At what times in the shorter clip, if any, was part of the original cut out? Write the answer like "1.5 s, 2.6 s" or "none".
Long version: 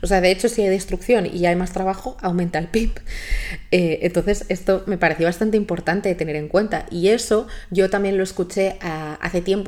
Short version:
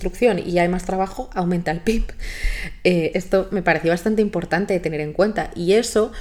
3.1 s